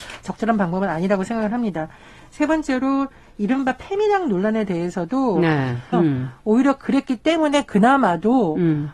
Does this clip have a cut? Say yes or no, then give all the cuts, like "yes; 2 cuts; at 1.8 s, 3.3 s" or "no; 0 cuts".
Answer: yes; 1 cut; at 5.9 s